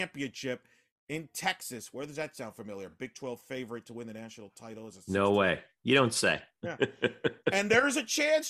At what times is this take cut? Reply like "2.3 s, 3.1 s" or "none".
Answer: none